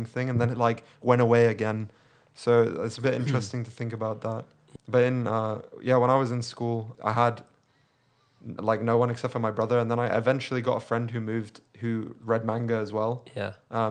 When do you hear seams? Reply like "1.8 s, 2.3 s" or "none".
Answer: 4.8 s, 6.9 s